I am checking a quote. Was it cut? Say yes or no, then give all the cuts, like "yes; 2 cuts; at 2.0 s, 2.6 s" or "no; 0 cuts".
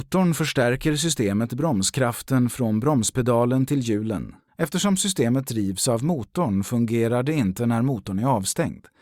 yes; 1 cut; at 4.5 s